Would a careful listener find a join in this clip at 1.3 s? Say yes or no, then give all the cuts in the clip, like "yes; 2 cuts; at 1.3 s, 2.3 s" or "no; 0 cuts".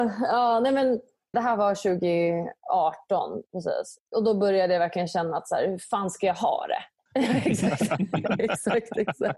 yes; 2 cuts; at 1.3 s, 7.1 s